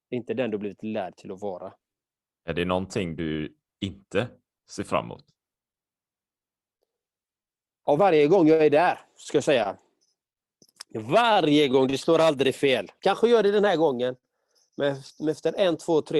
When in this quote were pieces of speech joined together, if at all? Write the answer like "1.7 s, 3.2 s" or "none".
8.0 s